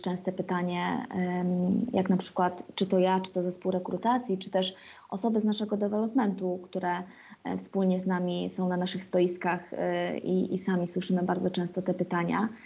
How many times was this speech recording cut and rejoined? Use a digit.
1